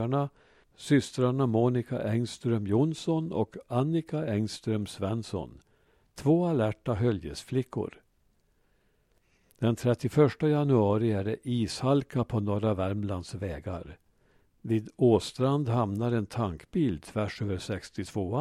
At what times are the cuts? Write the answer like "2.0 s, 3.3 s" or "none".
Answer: none

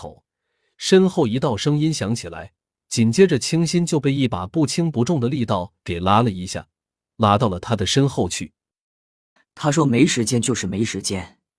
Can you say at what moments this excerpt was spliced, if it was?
9.4 s

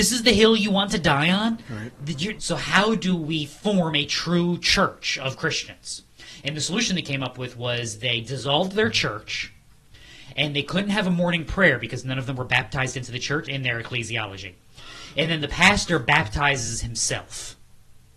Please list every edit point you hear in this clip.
2.4 s, 13.4 s

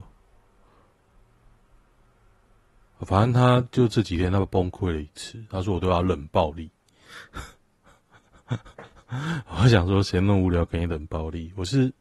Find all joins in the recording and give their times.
none

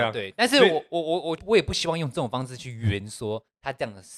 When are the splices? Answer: 1.4 s

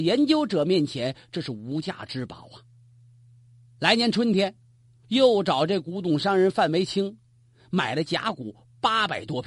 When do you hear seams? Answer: 5.0 s

